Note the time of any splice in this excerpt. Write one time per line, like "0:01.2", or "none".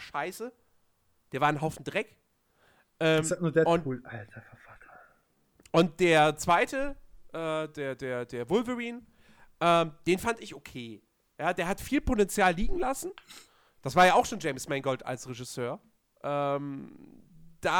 none